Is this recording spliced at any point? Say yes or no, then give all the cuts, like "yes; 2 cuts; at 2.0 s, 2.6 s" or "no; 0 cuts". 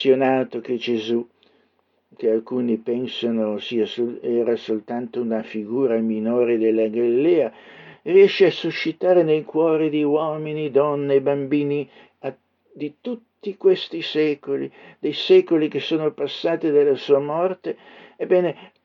no; 0 cuts